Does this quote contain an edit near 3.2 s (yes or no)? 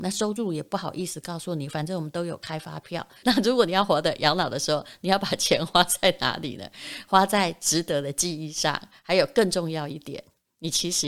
yes